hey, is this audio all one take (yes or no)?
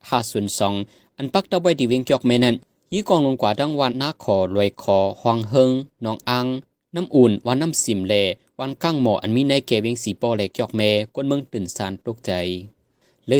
no